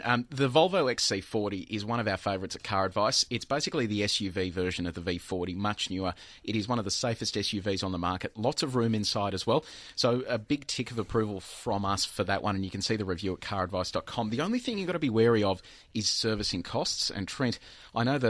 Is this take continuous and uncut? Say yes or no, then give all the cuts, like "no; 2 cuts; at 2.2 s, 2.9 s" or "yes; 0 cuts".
yes; 0 cuts